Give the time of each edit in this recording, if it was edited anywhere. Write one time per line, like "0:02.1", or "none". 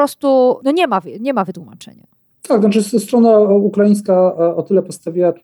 none